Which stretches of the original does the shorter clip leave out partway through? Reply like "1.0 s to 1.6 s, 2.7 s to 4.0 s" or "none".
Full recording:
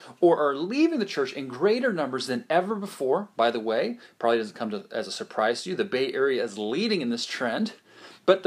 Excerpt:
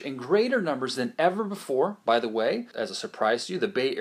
4.0 s to 4.9 s